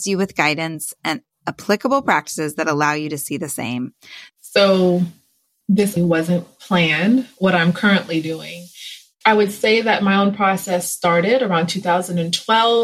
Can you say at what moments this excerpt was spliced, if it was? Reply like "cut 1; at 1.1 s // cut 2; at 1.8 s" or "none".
cut 1; at 4.3 s // cut 2; at 6.0 s // cut 3; at 9.2 s